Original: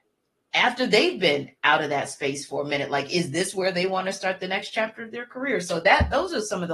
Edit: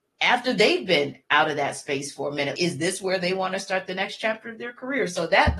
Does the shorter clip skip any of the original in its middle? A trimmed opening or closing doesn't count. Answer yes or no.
yes